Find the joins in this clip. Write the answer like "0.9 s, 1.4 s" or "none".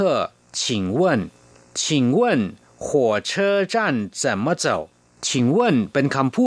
1.6 s, 5.2 s

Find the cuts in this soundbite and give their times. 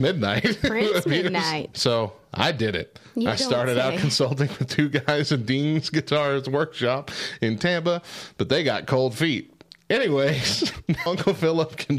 1.7 s, 11.1 s

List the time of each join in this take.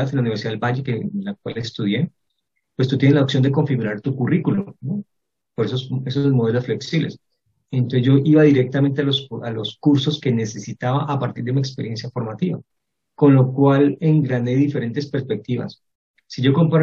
none

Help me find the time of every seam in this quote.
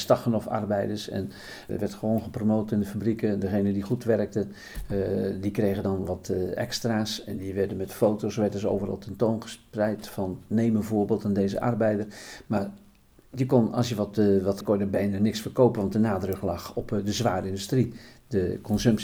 1.7 s, 14.6 s

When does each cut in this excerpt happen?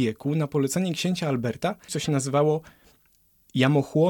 1.9 s

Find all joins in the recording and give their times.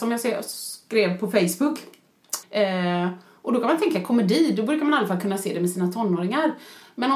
2.4 s

